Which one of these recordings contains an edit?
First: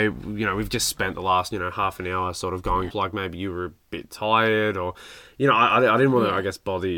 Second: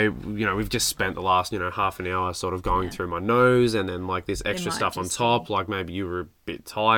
first; 1 cut; at 2.9 s

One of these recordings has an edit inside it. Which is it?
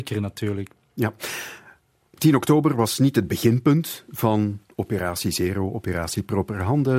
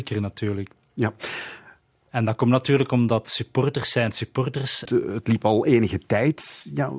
second; 2 cuts; at 2.1 s, 4.9 s

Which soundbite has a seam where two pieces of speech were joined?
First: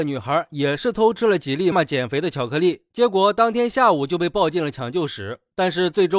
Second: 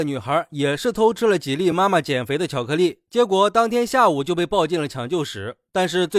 first; 1 cut; at 1.7 s

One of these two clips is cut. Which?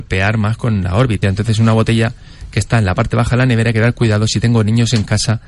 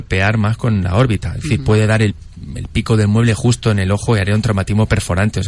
first; 1 cut; at 1.2 s

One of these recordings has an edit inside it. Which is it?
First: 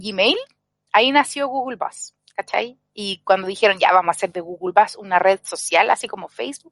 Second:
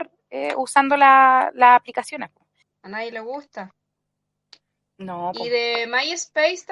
second; 1 cut; at 2.6 s

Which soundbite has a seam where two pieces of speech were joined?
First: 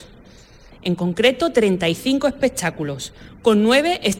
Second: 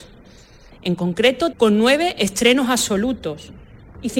second; 1 cut; at 1.5 s

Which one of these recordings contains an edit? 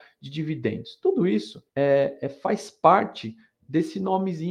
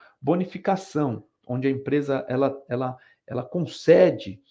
first; 1 cut; at 1.7 s

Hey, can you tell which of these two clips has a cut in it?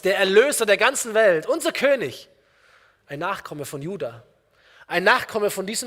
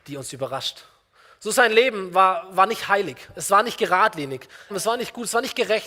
second; 1 cut; at 4.7 s

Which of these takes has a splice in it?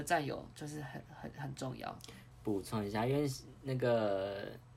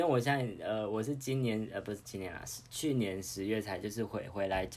first; 1 cut; at 2.3 s

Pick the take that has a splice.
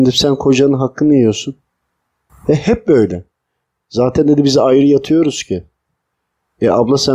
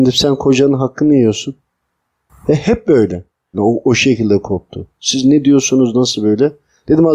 second; 1 cut; at 3.5 s

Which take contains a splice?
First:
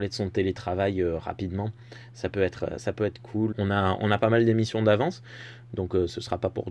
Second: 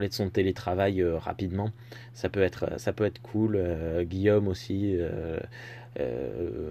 first; 1 cut; at 3.5 s

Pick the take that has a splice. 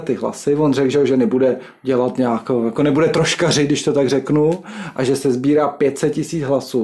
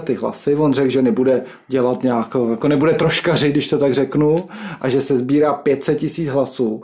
second; 1 cut; at 0.9 s

